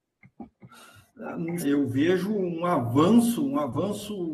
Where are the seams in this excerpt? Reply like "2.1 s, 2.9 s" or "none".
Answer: 1.6 s